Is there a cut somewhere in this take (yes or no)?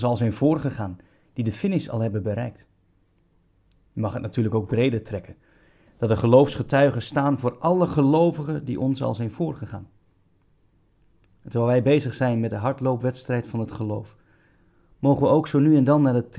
no